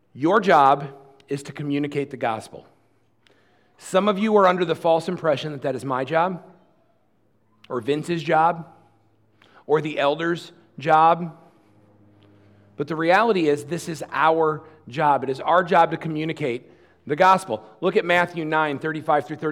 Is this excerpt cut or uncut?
uncut